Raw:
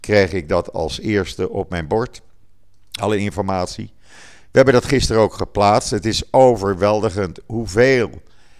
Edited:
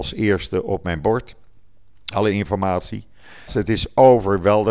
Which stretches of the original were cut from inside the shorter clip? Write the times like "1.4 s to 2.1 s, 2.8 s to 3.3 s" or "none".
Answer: 4.3 s to 5.8 s